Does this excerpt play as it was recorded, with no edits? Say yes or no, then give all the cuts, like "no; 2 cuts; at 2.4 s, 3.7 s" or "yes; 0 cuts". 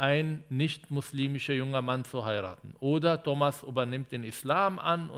yes; 0 cuts